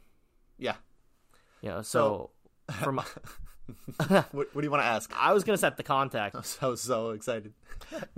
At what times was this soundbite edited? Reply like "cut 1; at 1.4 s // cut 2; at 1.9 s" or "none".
cut 1; at 5.1 s // cut 2; at 6.3 s